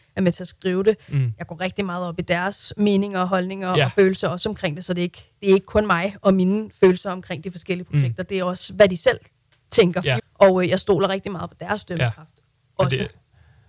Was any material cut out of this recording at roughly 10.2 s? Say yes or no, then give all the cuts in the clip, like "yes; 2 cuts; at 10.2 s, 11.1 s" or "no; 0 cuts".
yes; 1 cut; at 10.2 s